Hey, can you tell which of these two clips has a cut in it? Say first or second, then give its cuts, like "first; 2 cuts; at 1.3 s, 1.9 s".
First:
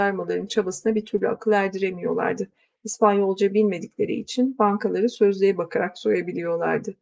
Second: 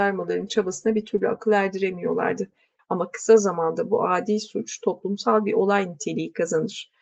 second; 1 cut; at 2.8 s